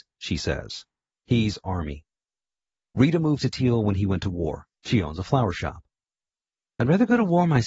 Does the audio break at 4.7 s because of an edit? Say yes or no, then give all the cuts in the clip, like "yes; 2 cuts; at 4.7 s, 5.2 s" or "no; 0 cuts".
yes; 2 cuts; at 1.1 s, 4.7 s